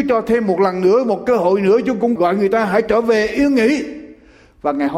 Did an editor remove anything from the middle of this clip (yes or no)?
yes